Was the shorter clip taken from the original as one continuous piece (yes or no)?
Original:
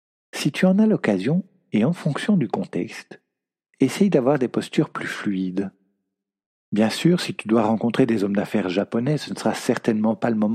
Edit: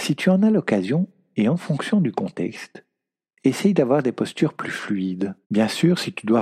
no